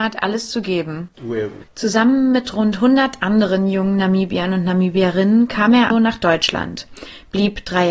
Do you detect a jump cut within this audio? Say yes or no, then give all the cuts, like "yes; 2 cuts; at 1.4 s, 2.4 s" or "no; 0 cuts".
yes; 2 cuts; at 1.6 s, 5.9 s